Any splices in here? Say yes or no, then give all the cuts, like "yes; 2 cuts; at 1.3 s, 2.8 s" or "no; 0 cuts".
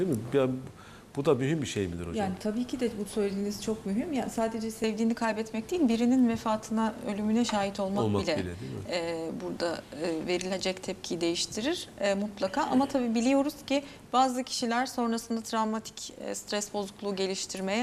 no; 0 cuts